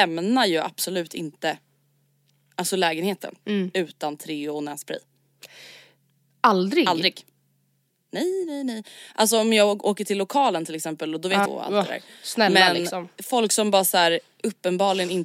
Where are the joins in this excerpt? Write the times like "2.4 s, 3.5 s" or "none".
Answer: 11.5 s